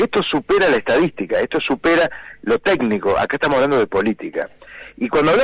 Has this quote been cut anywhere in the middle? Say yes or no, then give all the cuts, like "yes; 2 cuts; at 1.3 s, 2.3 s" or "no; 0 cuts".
no; 0 cuts